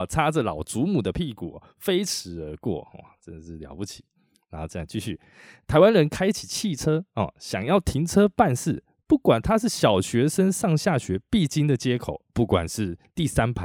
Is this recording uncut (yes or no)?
yes